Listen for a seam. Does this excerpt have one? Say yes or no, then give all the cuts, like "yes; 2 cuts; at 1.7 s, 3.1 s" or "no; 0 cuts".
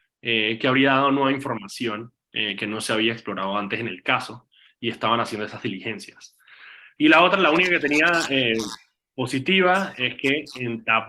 yes; 1 cut; at 7.0 s